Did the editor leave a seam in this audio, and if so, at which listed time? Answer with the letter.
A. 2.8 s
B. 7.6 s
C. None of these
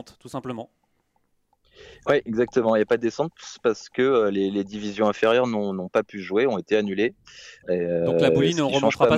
B